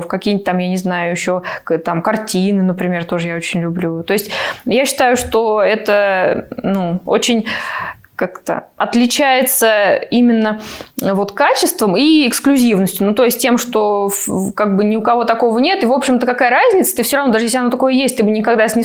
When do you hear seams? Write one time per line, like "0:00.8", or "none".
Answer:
none